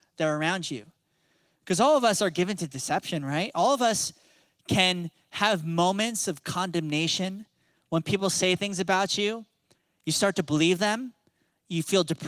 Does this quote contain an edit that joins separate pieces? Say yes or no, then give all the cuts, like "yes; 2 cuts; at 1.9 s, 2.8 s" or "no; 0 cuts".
no; 0 cuts